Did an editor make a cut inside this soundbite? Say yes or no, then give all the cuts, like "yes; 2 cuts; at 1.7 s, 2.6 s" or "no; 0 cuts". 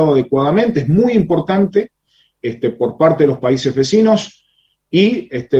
no; 0 cuts